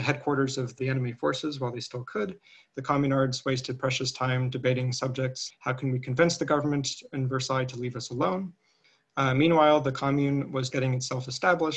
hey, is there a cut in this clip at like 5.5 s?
yes; 3 cuts; at 5.5 s, 9.1 s, 10.7 s

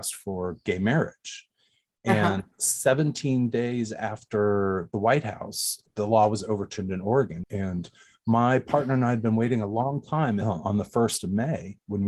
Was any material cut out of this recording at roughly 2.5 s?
yes; 3 cuts; at 2.5 s, 7.4 s, 10.4 s

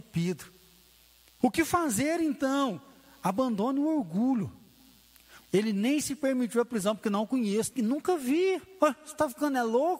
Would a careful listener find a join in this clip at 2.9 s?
no; 3 cuts; at 1.4 s, 5.4 s, 7.7 s

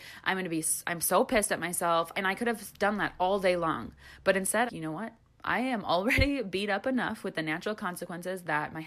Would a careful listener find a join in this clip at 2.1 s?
yes; 2 cuts; at 2.1 s, 4.7 s

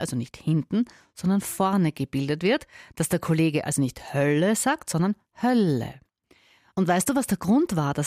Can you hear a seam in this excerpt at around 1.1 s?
no; 0 cuts

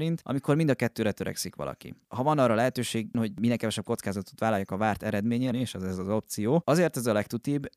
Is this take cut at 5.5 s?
yes; 1 cut; at 5.5 s

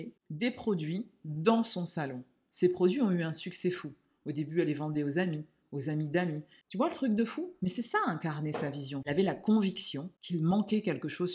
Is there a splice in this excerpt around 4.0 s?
no; 2 cuts; at 6.6 s, 9.0 s

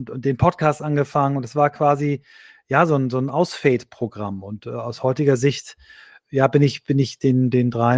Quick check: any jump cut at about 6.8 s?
no; 0 cuts

